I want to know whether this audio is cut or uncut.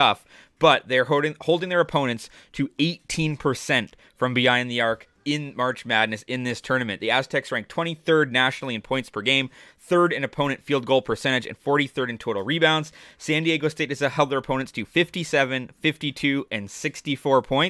uncut